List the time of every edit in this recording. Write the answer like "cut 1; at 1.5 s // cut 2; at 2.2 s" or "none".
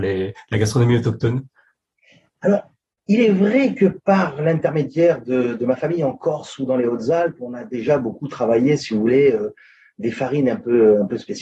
none